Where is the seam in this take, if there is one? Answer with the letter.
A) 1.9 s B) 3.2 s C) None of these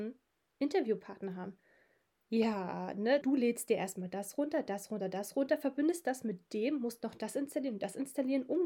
B